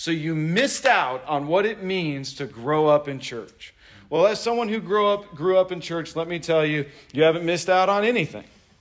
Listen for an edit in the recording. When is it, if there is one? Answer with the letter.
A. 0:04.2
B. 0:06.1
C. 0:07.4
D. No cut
D